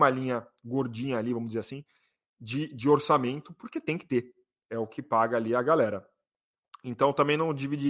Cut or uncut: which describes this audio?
uncut